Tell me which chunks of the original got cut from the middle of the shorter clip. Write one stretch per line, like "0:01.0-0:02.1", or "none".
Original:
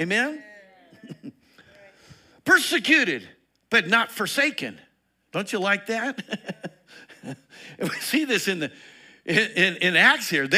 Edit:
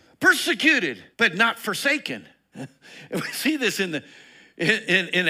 0:03.4-0:03.6
0:05.0-0:07.2